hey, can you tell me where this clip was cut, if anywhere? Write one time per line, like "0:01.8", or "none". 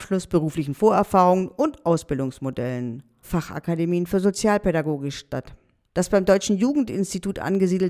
0:03.2
0:05.8